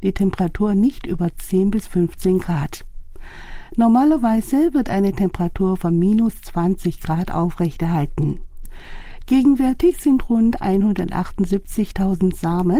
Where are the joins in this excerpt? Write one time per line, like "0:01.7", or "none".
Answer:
none